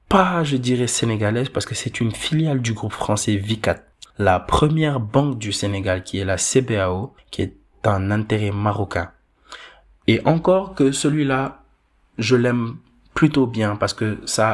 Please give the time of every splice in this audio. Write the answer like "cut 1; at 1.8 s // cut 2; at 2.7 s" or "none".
cut 1; at 4.1 s // cut 2; at 7.2 s